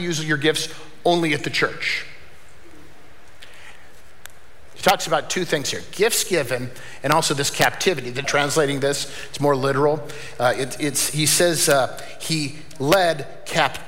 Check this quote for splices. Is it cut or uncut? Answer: cut